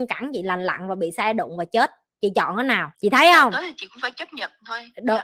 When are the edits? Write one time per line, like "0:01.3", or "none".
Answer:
0:02.9

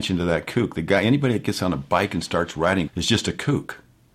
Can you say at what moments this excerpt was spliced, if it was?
0:02.9

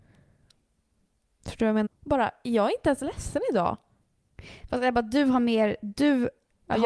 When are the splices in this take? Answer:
0:01.9

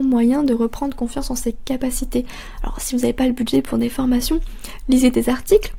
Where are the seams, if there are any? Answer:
none

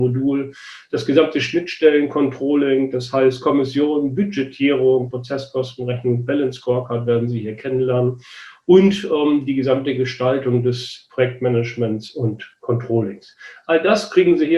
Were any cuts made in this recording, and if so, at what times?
0:05.1

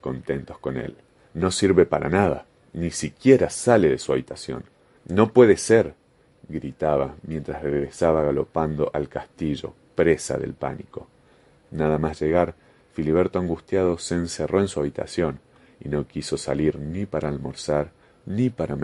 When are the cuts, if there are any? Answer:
0:01.3
0:05.0

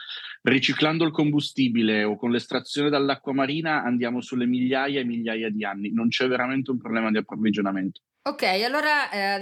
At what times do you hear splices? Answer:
none

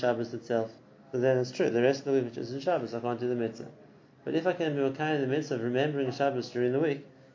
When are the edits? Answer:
0:01.1

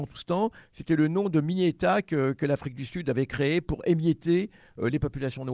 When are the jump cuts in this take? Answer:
none

